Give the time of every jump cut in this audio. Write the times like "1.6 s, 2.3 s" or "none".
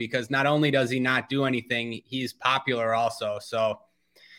none